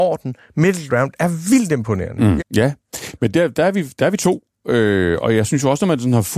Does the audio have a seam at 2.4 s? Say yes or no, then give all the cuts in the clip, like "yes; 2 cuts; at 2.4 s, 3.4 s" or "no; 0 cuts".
yes; 1 cut; at 2.4 s